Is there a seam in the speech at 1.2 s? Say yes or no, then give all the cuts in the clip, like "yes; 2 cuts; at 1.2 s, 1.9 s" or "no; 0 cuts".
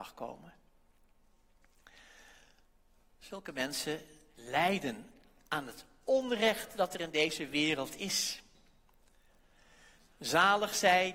no; 0 cuts